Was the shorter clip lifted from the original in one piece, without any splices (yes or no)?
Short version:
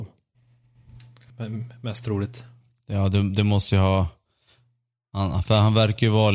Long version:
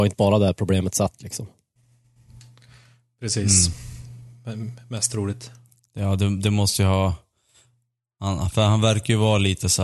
no